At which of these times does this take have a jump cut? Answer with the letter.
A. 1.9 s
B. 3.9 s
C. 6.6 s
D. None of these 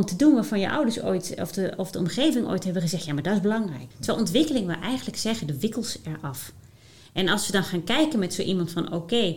B